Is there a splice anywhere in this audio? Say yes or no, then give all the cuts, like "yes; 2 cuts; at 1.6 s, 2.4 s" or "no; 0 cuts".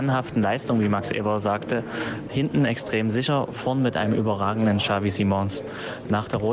no; 0 cuts